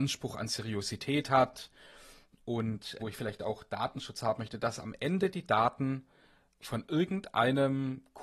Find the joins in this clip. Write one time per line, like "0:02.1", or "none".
0:03.0